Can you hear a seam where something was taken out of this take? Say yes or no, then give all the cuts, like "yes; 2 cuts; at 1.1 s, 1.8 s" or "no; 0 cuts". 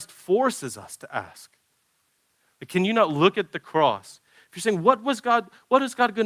no; 0 cuts